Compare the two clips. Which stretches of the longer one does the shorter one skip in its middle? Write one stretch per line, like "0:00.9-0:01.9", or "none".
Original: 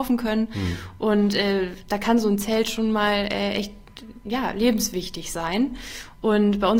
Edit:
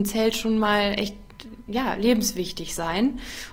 0:03.3-0:03.5

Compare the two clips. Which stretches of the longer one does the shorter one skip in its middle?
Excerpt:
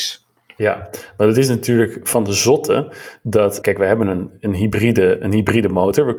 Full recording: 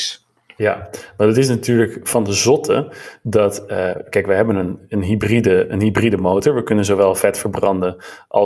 0:03.6-0:04.1

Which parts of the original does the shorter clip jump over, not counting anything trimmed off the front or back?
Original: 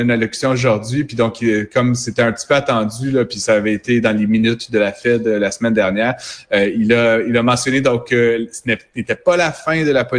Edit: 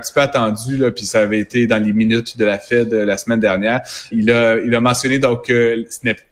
0:06.4-0:06.7

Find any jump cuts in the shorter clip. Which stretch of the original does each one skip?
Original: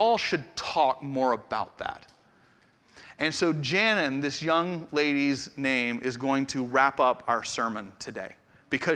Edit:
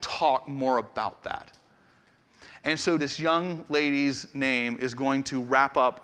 0:03.5-0:04.2

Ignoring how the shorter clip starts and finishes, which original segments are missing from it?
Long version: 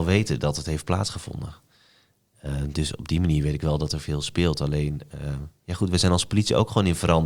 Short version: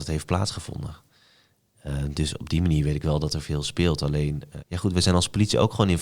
0:05.2-0:05.6

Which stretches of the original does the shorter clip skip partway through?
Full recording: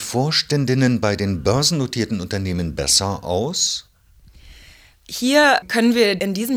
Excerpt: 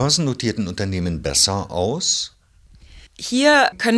0:04.6-0:05.0

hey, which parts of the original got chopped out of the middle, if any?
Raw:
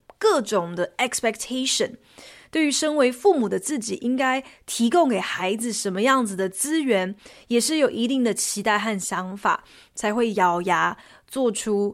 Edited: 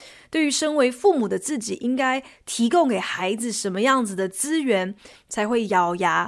0:07.3-0:09.8

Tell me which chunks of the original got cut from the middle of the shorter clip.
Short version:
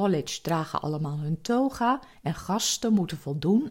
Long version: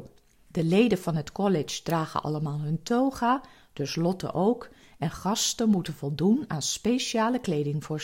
0:03.5-0:04.9

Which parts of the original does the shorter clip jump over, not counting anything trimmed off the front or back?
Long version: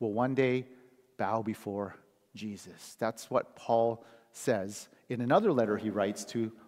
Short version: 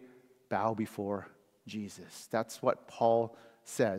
none

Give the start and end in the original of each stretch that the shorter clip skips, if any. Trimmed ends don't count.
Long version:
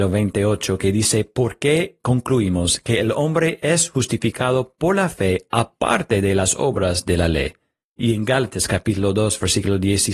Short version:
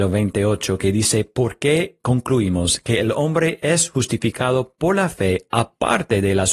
none

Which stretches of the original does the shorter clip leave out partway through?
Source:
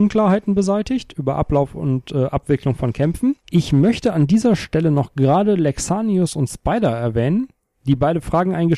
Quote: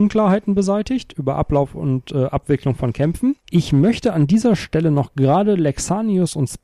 none

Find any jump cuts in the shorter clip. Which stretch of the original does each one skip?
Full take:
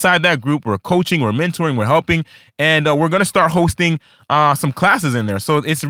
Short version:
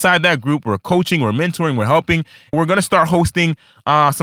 0:02.5-0:03.0

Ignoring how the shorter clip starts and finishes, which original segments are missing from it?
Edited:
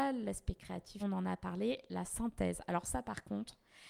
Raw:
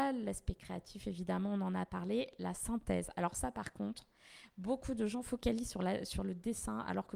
0:01.0-0:01.5

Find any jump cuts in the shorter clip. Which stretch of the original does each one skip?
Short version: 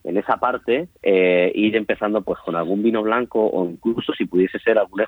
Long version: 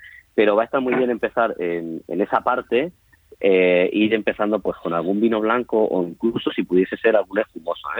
0:03.0-0:03.3

